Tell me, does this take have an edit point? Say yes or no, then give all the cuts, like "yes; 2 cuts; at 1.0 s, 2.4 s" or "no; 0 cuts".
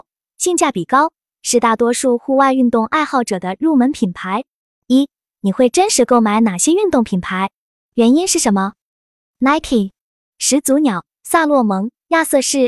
yes; 2 cuts; at 4.7 s, 10.3 s